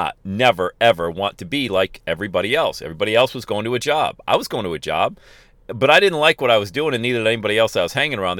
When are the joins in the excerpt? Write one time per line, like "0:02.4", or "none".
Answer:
none